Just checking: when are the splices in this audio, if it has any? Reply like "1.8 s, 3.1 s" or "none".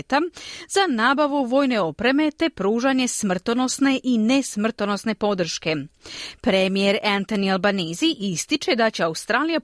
none